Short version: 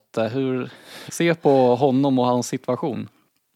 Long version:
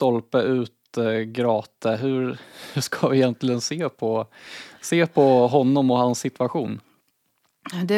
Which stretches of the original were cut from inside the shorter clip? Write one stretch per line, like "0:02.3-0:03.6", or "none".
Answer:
0:02.7-0:04.8